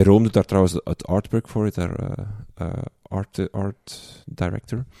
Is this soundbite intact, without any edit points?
yes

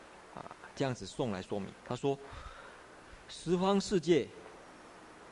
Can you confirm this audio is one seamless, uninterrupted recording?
yes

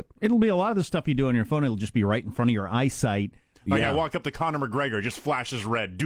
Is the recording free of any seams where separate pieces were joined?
no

